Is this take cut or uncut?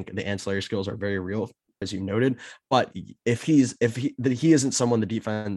cut